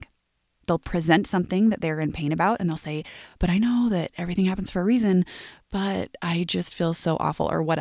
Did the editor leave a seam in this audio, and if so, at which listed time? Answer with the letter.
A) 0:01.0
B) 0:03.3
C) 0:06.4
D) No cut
D